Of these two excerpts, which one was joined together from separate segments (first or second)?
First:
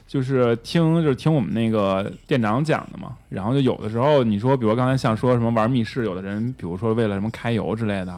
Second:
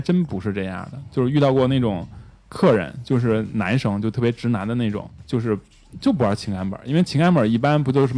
second